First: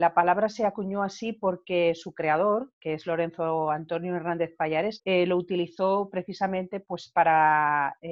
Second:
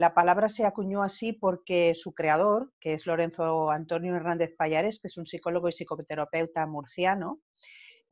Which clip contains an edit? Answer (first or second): first